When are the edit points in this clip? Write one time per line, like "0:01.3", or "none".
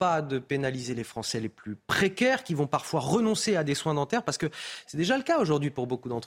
none